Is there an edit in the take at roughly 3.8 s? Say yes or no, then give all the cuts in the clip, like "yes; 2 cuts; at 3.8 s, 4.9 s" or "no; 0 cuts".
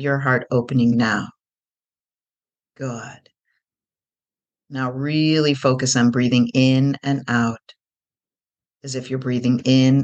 no; 0 cuts